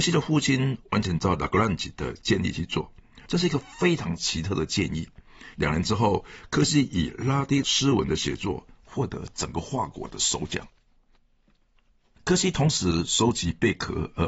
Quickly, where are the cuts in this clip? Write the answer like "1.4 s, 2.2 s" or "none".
3.3 s, 5.5 s

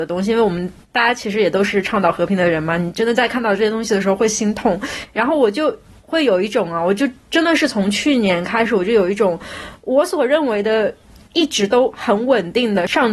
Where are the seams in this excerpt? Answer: none

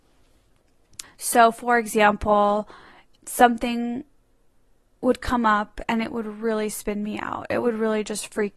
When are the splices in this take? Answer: 1.0 s, 3.2 s

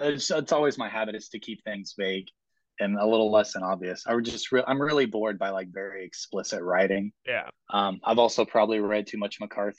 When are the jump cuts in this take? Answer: 7.5 s

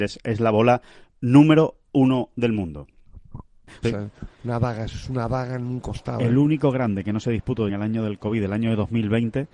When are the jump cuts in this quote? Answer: 3.8 s, 7.7 s

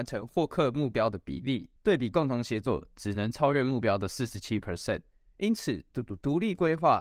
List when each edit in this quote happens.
1.8 s

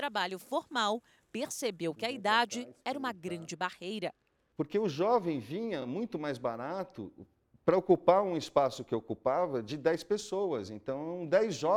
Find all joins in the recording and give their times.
none

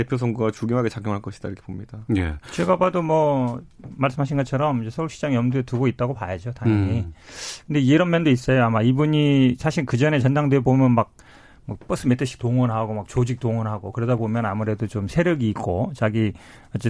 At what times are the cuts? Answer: none

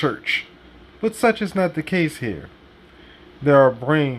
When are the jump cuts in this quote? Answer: none

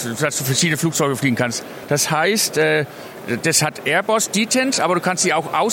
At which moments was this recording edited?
none

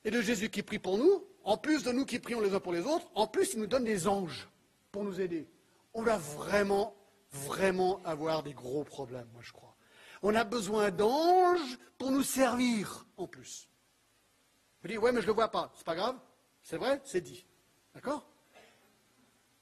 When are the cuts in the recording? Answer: none

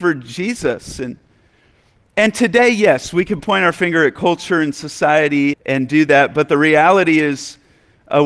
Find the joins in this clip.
5.5 s

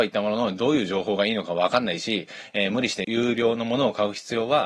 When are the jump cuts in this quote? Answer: 3.0 s

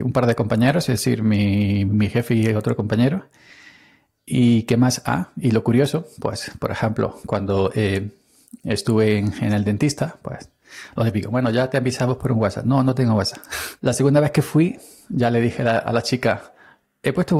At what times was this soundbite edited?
13.8 s

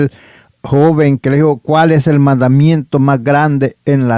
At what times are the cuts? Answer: none

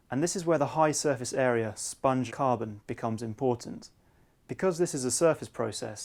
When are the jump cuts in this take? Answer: 2.3 s

